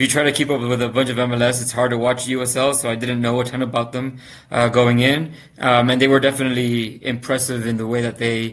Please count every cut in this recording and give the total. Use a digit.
0